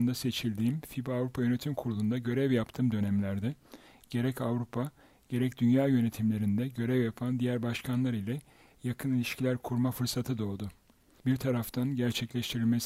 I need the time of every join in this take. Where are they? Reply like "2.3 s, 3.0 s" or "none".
11.2 s

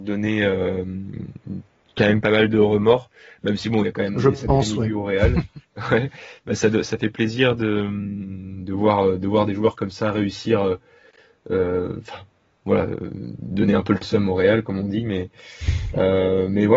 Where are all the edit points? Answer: none

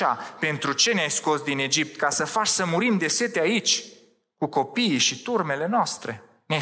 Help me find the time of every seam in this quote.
none

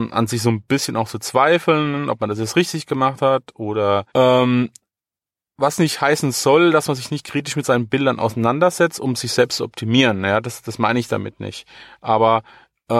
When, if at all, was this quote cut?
4.1 s

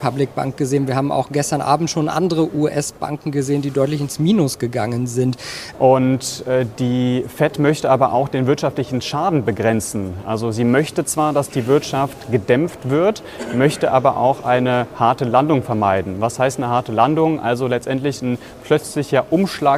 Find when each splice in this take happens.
5.7 s

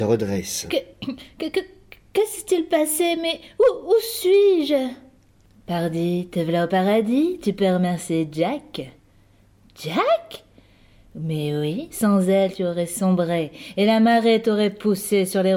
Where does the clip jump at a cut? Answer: 11.9 s

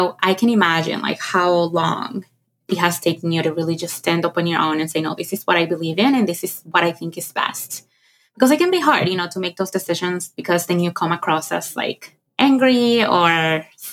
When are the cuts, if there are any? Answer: none

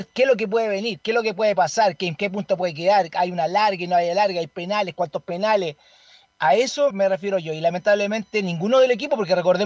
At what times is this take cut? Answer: 6.9 s

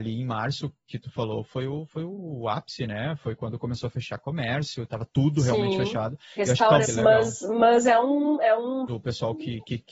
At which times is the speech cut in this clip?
6.8 s, 8.9 s

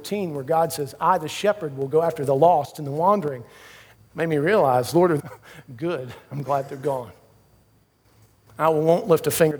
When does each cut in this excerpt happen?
3.9 s, 5.2 s

